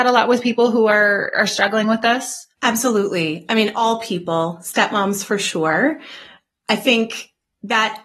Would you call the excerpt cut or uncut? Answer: cut